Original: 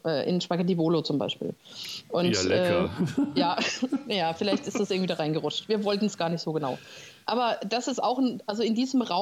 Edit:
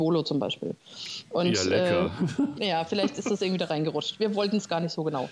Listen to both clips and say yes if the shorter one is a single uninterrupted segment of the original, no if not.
no